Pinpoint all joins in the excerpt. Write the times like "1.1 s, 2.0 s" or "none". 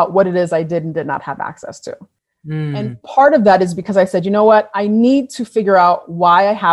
none